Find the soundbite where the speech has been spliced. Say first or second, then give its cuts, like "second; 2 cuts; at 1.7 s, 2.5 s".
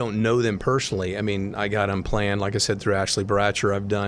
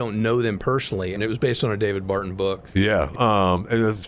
second; 2 cuts; at 1.2 s, 3.1 s